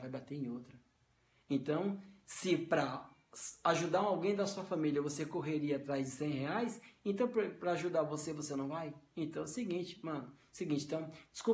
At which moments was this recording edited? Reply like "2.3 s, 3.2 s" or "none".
none